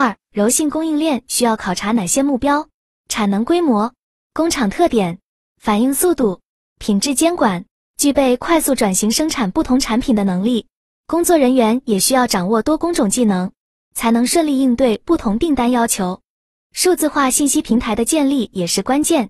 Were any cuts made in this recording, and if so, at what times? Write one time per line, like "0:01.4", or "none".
0:07.8